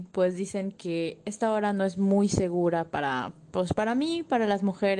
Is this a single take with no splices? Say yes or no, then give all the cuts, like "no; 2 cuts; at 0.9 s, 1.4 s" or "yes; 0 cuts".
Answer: yes; 0 cuts